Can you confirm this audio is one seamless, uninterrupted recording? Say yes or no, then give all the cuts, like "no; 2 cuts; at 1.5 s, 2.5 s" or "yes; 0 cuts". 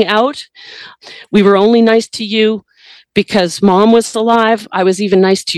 yes; 0 cuts